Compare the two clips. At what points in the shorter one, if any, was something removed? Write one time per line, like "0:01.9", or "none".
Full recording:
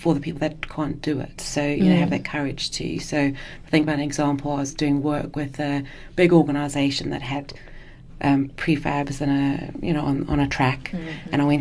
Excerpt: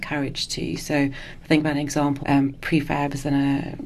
0:02.2